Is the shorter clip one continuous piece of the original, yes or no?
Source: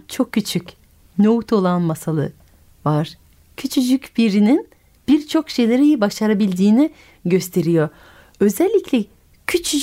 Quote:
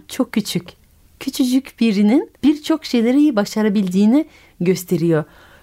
no